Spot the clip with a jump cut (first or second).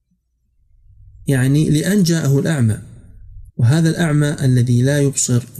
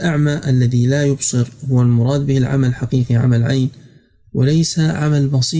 first